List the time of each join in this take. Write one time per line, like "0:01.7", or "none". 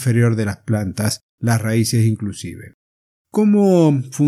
0:03.2